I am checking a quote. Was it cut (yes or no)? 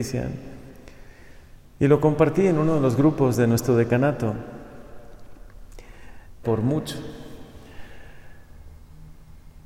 yes